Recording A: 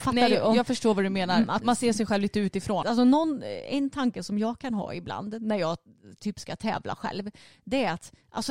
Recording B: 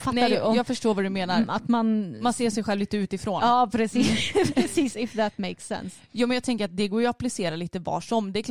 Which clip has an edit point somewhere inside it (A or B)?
A